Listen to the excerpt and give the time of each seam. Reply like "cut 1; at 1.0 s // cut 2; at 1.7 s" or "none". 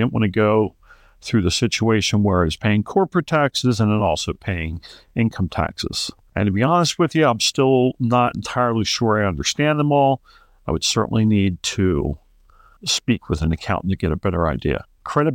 cut 1; at 6.3 s // cut 2; at 12.8 s